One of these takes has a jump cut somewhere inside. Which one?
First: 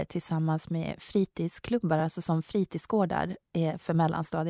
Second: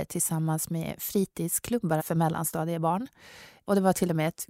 second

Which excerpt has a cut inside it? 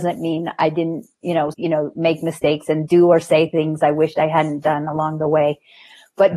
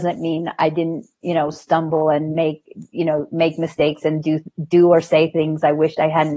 first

